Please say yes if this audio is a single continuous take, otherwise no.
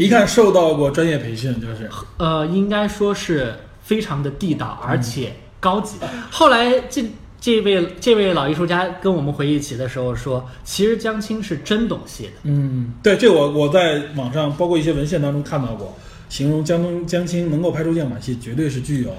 no